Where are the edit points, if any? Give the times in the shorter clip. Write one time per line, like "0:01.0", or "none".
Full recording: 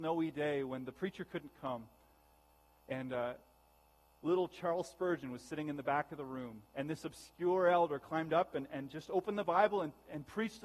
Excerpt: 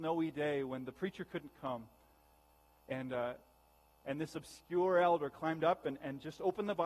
0:04.0

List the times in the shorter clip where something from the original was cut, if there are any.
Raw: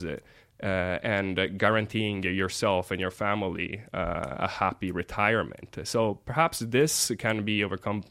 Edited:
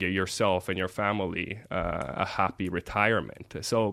none

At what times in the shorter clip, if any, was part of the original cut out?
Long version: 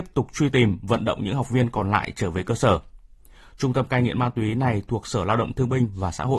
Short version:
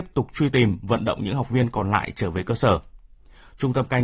none

